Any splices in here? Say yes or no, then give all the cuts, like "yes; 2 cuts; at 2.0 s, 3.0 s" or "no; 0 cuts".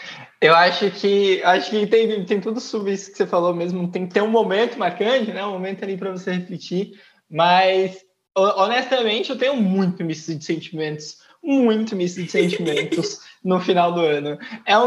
no; 0 cuts